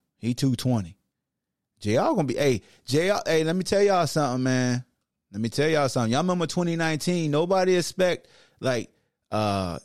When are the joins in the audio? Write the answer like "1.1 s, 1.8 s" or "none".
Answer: none